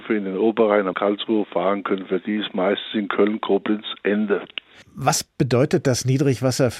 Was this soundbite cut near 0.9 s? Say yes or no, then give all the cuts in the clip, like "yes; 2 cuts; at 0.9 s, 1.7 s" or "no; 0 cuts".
yes; 2 cuts; at 0.9 s, 4.8 s